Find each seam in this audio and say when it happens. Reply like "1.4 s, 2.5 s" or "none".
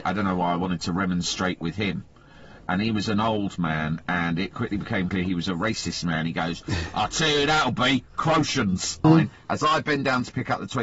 9.0 s